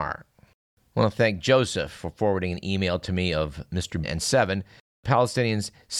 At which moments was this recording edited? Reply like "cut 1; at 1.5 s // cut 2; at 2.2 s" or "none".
cut 1; at 4.0 s